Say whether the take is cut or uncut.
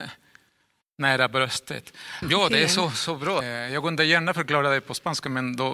cut